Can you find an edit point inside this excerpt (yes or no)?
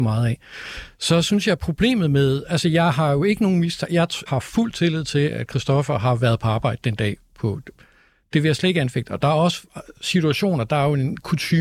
yes